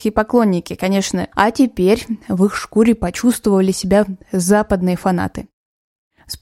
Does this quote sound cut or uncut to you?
cut